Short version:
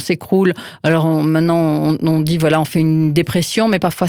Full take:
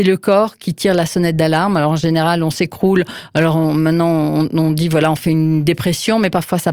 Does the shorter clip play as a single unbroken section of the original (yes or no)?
yes